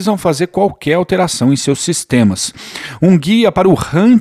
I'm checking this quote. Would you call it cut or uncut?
uncut